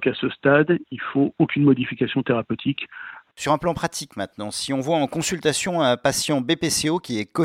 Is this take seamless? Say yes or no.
no